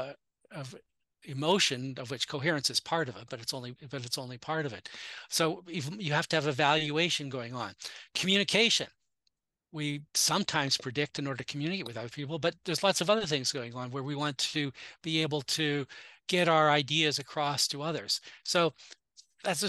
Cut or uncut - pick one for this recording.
cut